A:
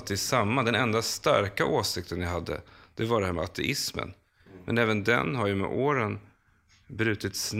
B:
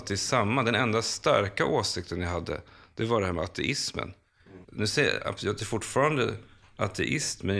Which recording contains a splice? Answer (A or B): B